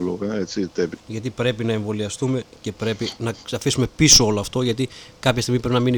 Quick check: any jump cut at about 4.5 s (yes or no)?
no